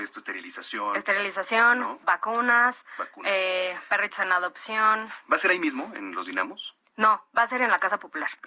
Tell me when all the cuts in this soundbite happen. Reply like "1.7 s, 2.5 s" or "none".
none